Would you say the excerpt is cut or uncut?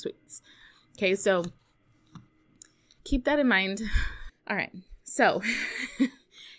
cut